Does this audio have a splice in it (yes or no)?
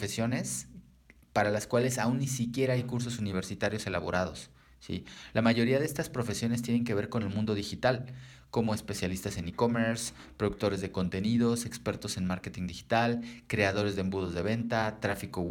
yes